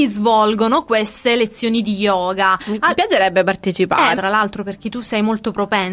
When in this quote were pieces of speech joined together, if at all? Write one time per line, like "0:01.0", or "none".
0:04.1